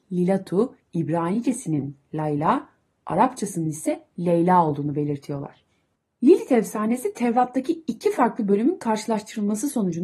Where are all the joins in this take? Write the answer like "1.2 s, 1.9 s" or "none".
6.1 s

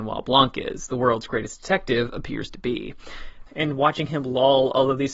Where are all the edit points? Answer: 3.5 s

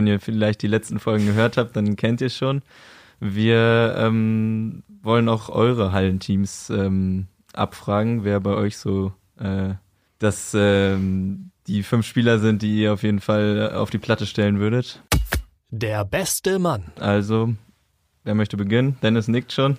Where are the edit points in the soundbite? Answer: none

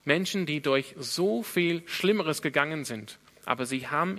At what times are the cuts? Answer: none

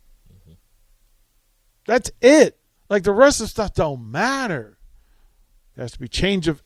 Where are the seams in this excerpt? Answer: 2.8 s, 5.7 s

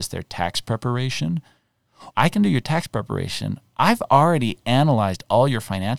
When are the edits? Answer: 2.1 s

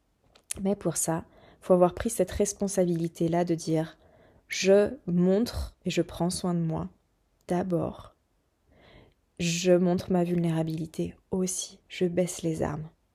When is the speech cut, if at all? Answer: none

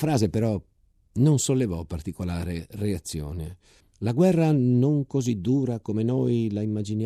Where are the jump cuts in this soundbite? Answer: 3.8 s

